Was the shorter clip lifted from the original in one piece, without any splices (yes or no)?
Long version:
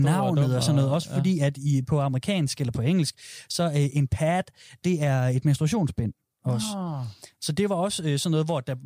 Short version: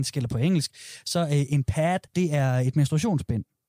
no